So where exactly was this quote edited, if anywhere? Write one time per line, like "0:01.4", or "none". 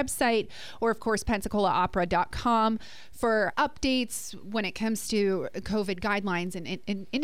0:03.5